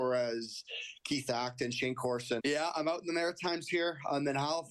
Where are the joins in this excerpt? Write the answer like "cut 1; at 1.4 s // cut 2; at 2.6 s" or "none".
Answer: cut 1; at 2.4 s